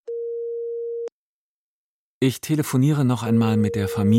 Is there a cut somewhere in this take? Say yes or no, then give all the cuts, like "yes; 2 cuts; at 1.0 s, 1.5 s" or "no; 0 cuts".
no; 0 cuts